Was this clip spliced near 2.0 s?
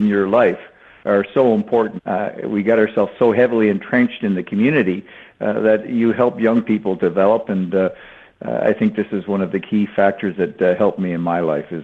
yes; 1 cut; at 2.0 s

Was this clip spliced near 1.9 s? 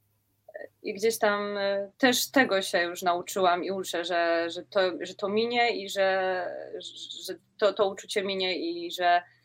yes; 1 cut; at 1.9 s

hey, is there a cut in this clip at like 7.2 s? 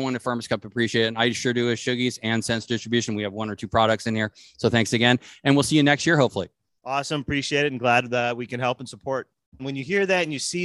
no; 1 cut; at 9.6 s

